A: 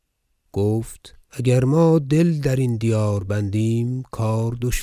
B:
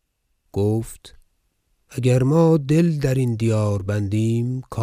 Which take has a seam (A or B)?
A